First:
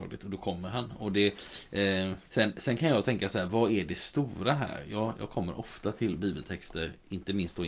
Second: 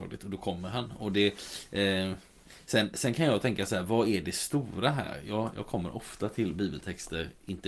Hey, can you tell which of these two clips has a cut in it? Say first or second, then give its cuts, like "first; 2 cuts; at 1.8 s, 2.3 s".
first; 1 cut; at 2.2 s